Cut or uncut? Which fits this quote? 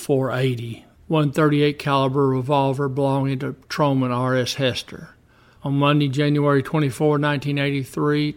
cut